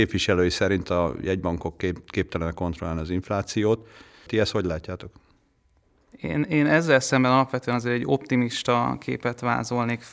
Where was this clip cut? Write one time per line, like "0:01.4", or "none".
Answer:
0:04.3